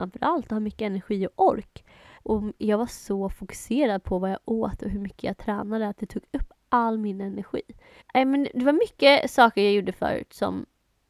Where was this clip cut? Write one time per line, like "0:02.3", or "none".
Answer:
0:02.2
0:08.0